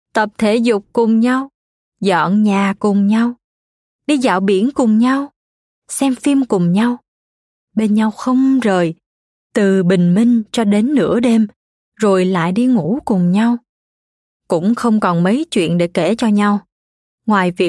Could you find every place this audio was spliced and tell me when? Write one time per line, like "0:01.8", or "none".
none